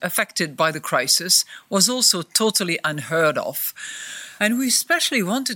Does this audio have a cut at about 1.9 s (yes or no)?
no